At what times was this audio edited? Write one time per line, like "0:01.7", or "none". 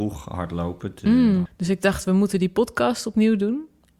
0:01.5